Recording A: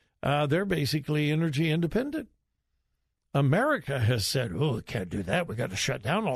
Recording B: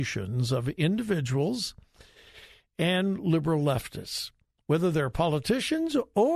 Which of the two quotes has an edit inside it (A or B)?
A